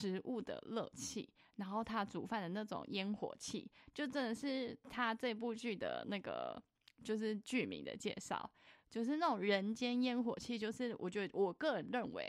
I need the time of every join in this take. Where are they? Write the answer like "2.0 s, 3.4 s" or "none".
none